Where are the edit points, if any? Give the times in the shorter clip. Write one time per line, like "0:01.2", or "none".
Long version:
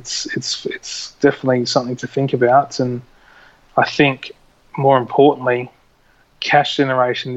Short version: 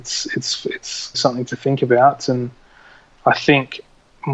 0:01.1